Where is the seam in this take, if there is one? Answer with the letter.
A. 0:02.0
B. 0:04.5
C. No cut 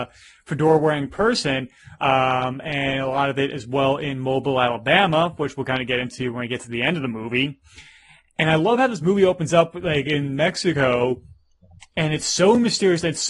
A